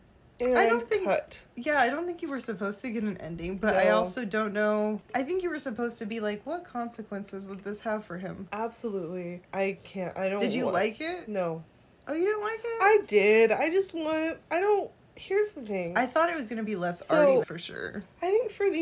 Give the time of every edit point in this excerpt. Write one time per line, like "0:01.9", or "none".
0:17.4